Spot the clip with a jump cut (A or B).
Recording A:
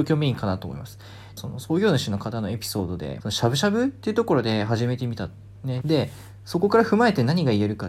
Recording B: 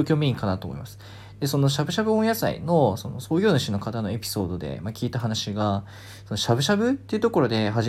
A